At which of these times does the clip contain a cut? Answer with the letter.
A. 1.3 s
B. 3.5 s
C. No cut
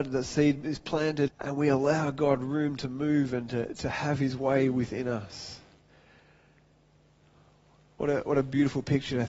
A